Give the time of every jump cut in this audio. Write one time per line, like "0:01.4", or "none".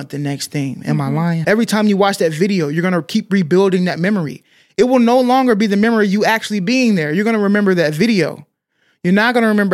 0:01.4